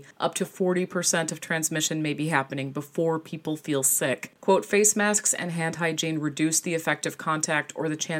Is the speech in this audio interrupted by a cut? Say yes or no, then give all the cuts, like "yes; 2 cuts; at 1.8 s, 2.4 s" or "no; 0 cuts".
no; 0 cuts